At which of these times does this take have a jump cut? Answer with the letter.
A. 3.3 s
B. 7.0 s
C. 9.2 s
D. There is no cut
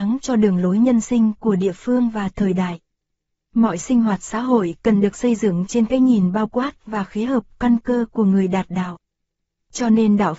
D